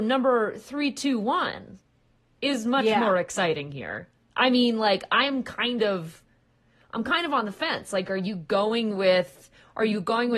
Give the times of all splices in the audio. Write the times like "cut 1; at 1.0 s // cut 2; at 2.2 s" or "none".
none

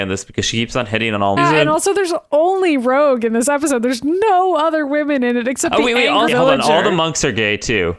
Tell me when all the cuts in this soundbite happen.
cut 1; at 1.4 s // cut 2; at 6.3 s

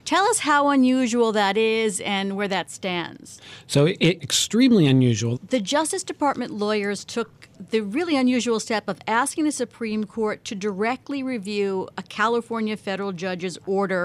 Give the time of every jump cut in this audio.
cut 1; at 4.2 s // cut 2; at 5.4 s

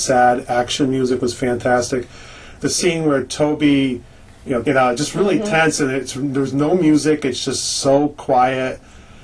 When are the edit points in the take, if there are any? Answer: cut 1; at 4.6 s

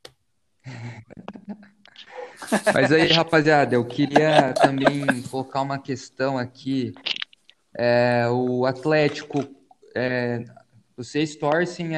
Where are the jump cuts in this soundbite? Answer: none

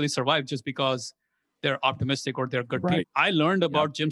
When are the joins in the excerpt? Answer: cut 1; at 3.0 s

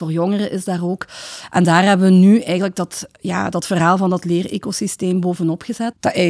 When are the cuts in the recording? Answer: none

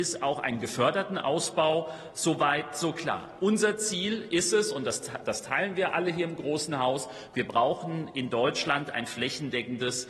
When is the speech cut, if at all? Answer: none

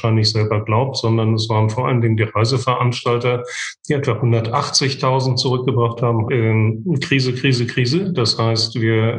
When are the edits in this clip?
cut 1; at 6.3 s

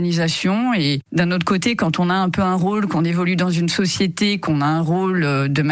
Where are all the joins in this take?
none

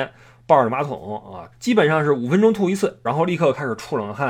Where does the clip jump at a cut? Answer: cut 1; at 1.5 s // cut 2; at 3.1 s

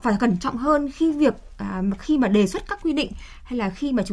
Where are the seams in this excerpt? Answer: none

